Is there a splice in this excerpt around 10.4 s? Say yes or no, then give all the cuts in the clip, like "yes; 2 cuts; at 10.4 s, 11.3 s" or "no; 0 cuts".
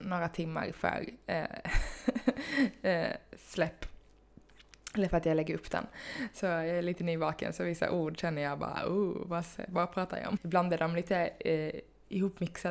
yes; 1 cut; at 10.4 s